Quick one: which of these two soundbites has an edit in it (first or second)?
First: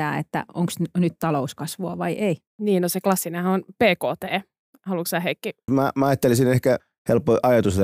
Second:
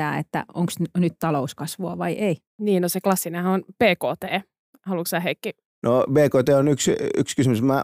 first